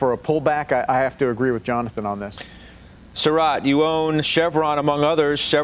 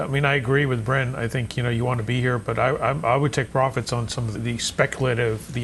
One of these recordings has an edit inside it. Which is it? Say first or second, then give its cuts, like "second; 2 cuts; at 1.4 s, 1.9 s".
second; 1 cut; at 4.3 s